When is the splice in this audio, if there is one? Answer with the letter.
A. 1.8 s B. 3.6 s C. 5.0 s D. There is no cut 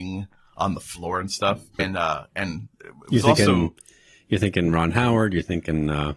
A